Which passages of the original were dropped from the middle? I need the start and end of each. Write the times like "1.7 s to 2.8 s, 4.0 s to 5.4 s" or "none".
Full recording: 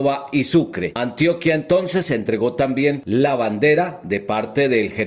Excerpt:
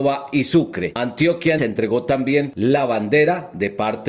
1.6 s to 2.1 s